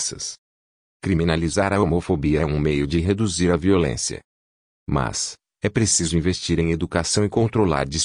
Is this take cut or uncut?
cut